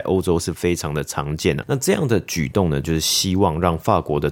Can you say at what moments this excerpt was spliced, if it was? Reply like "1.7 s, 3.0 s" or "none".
1.6 s, 2.8 s